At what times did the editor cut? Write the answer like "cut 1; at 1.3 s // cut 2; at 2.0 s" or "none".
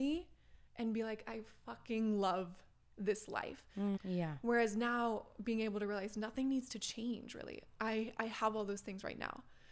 cut 1; at 4.0 s